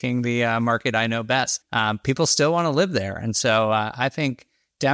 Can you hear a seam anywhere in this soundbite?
yes; 1 cut; at 1.6 s

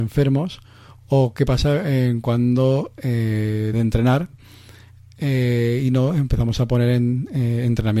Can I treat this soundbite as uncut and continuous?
no; 1 cut; at 3.7 s

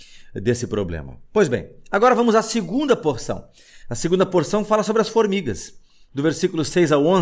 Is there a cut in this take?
no; 0 cuts

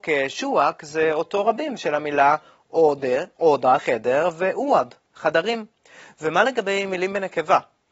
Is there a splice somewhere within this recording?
yes; 1 cut; at 3.8 s

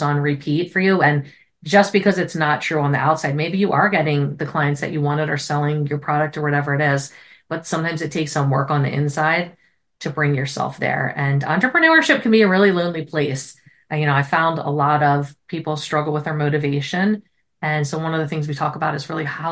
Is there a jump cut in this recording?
no; 0 cuts

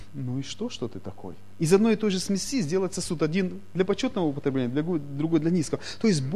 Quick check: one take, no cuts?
no; 1 cut; at 1.5 s

